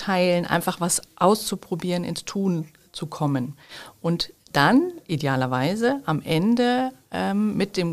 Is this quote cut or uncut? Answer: uncut